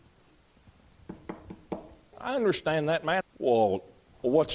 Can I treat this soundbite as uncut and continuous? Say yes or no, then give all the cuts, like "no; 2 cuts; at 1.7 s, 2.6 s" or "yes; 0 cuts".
no; 2 cuts; at 2.1 s, 3.2 s